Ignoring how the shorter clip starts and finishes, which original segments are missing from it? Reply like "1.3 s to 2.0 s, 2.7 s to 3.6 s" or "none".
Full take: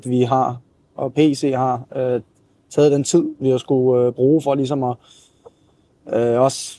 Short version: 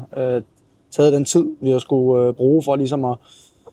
none